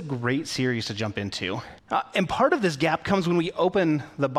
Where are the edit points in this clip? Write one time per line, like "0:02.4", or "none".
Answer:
0:01.8